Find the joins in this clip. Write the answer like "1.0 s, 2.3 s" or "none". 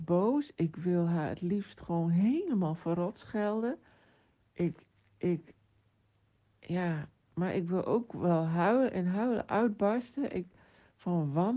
none